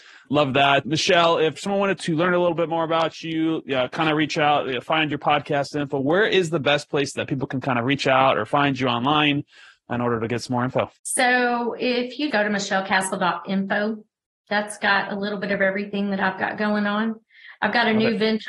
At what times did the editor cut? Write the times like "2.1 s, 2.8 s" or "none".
11.0 s, 12.3 s